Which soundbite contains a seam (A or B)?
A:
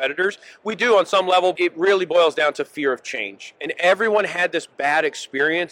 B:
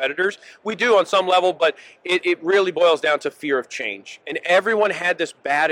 A